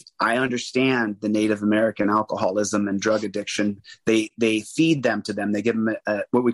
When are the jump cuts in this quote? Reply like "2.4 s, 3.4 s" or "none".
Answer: none